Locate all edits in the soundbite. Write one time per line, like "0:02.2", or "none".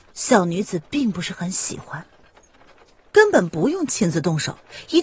0:03.1